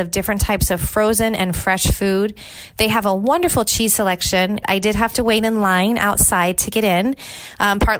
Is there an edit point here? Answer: yes; 1 cut; at 4.6 s

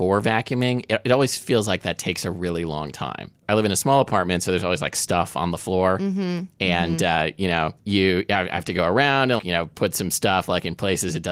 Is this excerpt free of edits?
no; 1 cut; at 9.4 s

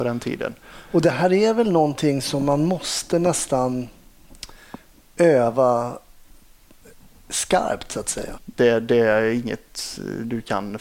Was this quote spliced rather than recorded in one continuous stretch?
yes; 1 cut; at 8.4 s

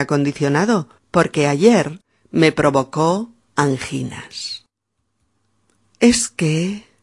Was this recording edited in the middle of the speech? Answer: yes; 1 cut; at 1.0 s

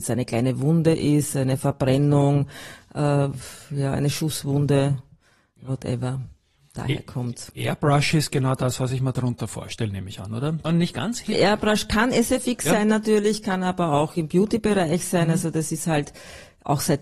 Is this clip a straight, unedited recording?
no; 1 cut; at 10.6 s

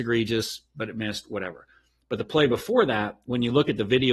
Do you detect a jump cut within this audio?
no; 0 cuts

